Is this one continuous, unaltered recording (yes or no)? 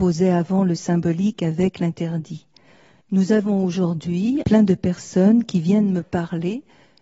no